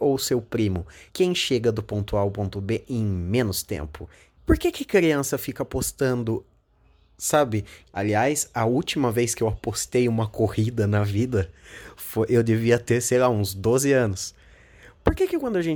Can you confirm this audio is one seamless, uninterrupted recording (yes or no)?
no